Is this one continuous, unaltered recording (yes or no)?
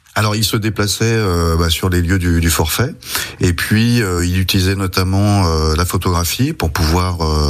yes